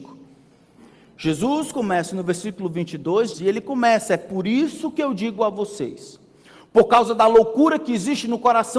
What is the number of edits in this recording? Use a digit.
1